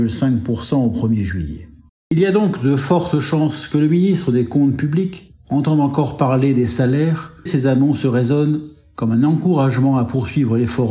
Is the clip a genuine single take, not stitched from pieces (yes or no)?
no